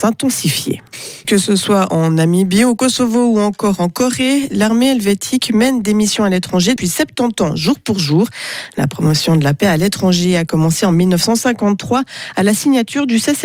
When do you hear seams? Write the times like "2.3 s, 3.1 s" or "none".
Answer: 1.2 s, 6.8 s

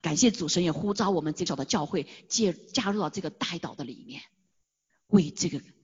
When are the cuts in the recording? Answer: 1.5 s

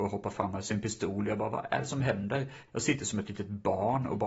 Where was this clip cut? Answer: 2.7 s

